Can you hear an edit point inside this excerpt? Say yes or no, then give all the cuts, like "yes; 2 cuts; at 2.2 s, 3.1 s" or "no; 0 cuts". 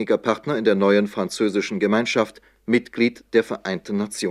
no; 0 cuts